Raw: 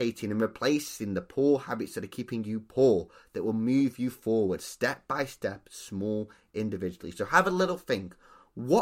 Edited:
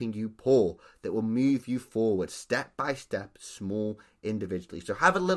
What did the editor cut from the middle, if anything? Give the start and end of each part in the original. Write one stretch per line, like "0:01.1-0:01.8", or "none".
none